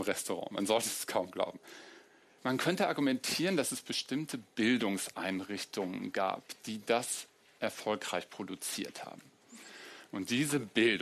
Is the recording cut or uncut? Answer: cut